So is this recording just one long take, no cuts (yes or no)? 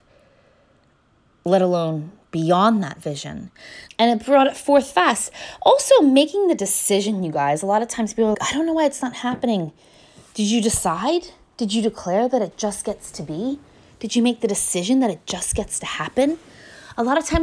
no